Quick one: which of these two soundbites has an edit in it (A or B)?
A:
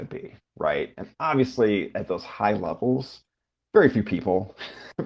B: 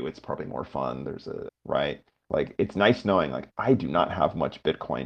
B